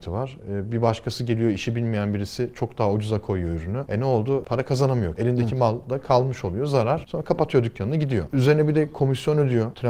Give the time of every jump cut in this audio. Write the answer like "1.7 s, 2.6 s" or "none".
none